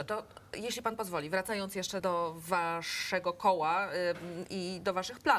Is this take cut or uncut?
cut